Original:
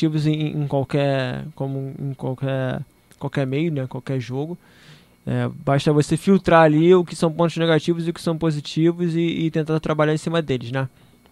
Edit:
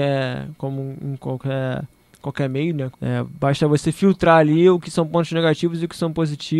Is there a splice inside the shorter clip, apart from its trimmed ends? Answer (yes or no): yes